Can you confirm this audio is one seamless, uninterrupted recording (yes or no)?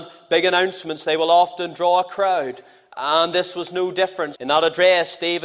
no